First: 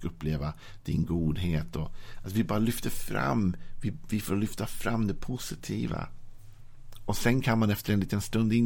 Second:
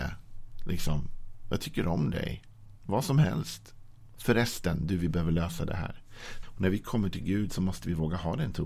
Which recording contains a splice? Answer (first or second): second